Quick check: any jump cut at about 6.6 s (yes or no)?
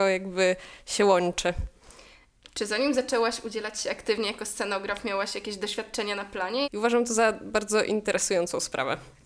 yes